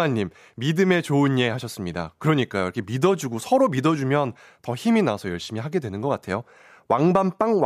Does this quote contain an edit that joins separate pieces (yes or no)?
no